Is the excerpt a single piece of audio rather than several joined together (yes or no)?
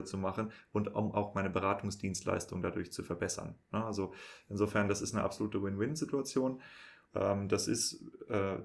no